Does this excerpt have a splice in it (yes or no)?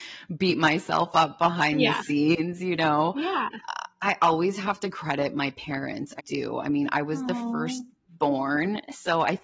yes